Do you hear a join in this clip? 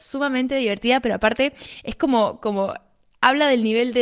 no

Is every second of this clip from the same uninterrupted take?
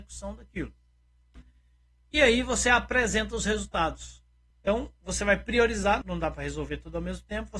no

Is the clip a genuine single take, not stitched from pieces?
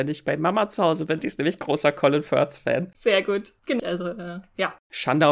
no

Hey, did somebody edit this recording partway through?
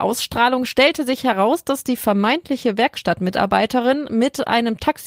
no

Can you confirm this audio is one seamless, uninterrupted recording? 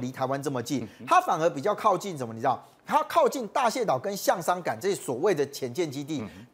yes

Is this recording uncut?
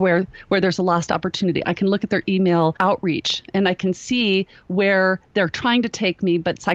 no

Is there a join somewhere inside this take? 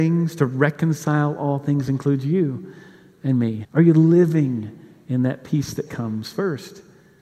yes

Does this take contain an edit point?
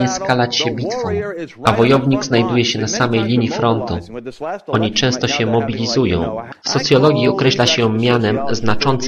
yes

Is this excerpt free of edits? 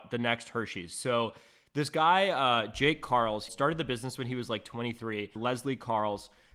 no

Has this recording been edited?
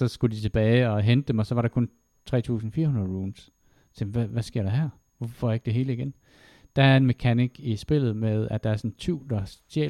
no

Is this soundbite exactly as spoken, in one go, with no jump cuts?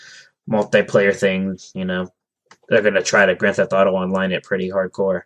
yes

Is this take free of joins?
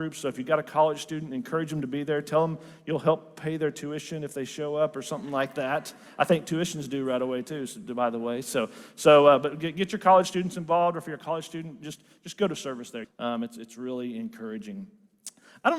no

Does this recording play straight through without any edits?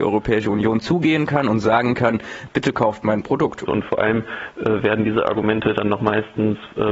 no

